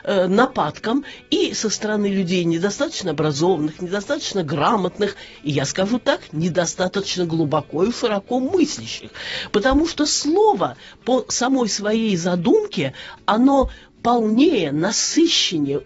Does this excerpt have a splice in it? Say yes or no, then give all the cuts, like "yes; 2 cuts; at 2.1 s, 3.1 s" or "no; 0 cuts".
no; 0 cuts